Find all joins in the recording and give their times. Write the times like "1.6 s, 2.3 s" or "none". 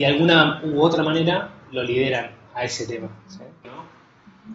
3.6 s